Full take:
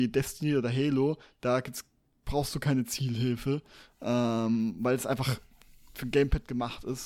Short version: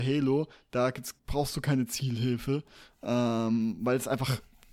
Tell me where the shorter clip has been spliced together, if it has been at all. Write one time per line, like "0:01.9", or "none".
0:01.2